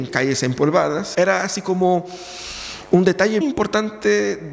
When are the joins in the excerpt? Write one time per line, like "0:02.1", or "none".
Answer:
0:01.1
0:03.4